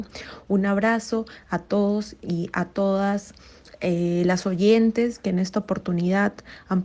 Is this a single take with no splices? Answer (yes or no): yes